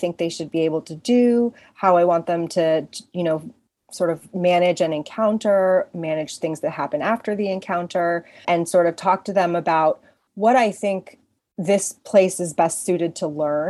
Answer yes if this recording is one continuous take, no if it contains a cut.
no